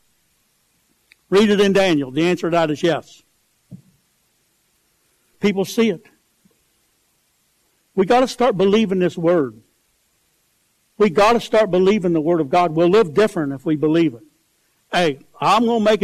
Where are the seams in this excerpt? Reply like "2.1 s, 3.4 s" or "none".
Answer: 5.3 s, 14.8 s